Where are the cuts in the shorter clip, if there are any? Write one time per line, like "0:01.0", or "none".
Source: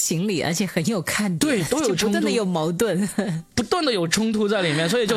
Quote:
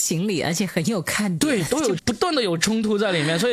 0:02.0